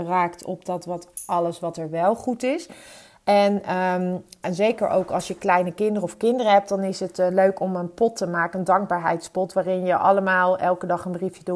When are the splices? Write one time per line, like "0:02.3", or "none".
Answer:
none